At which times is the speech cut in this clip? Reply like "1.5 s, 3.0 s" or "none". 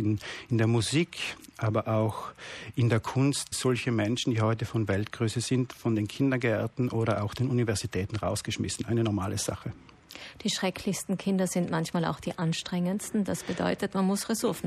3.5 s